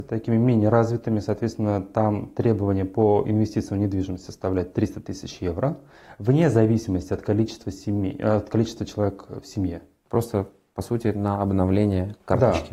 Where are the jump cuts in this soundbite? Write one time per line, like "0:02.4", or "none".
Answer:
0:10.1